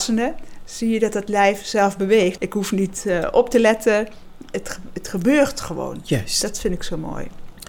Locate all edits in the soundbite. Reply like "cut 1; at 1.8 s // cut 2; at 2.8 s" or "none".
cut 1; at 2.4 s